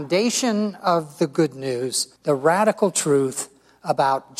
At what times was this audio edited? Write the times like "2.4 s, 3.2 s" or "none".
2.2 s